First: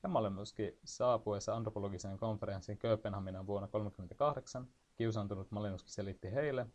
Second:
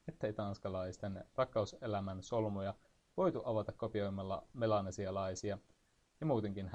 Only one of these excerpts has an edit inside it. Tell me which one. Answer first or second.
first